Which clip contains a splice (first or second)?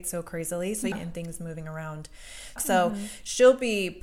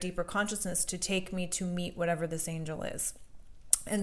first